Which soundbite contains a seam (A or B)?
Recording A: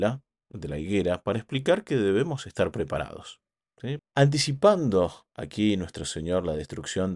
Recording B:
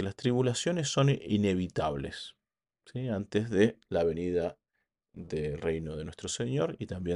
A